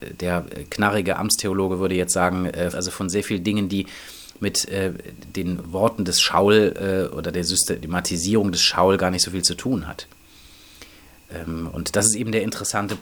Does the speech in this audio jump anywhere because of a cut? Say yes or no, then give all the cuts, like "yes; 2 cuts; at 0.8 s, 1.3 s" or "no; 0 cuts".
yes; 1 cut; at 2.7 s